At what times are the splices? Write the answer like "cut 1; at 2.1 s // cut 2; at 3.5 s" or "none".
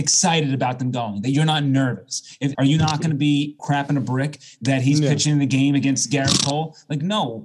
cut 1; at 2.5 s // cut 2; at 3.6 s